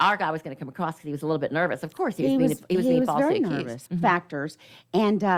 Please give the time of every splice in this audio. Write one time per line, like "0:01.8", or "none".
0:03.9